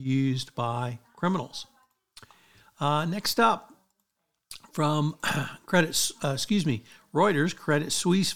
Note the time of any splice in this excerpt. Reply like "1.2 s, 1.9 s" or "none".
none